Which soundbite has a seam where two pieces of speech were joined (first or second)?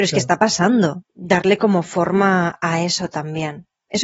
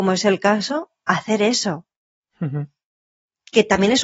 first